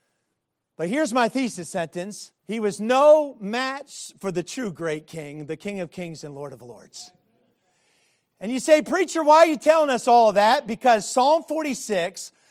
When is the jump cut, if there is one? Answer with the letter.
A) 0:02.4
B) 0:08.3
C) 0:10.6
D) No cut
A